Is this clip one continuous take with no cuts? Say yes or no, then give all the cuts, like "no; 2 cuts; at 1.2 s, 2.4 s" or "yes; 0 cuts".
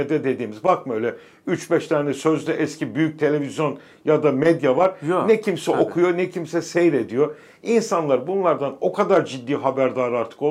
yes; 0 cuts